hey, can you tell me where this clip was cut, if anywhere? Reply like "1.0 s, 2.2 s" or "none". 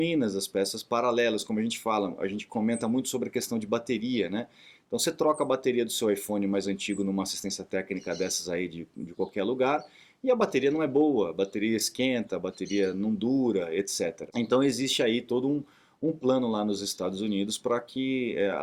14.3 s